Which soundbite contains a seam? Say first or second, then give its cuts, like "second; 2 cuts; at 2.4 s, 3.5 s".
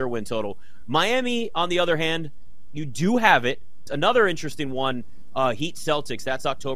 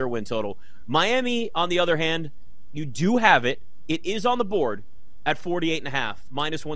first; 1 cut; at 3.9 s